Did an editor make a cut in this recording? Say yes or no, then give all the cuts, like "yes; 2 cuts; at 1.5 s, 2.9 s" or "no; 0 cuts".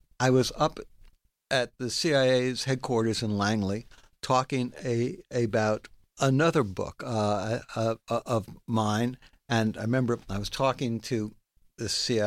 no; 0 cuts